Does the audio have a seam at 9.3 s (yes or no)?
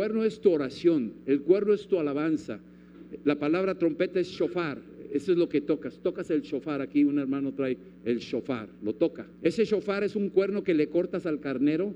yes